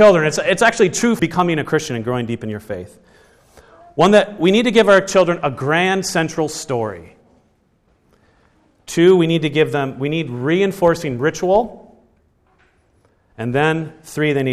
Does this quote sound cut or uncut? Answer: cut